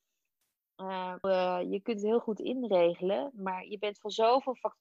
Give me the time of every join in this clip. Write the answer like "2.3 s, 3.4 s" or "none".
1.2 s